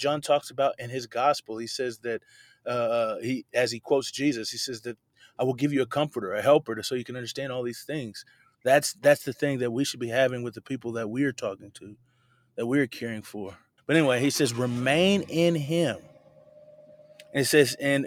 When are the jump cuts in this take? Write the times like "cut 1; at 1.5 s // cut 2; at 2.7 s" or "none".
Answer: cut 1; at 8.5 s // cut 2; at 13.8 s